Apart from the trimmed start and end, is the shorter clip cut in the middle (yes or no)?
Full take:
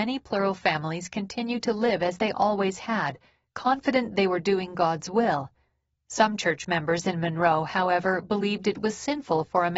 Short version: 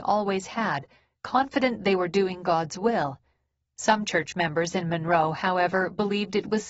no